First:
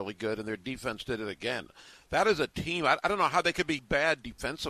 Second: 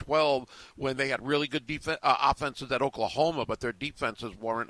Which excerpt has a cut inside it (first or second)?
first